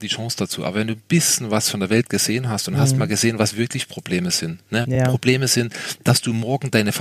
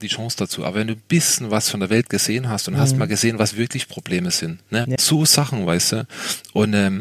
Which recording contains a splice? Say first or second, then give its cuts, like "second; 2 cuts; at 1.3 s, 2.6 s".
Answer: second; 1 cut; at 5.0 s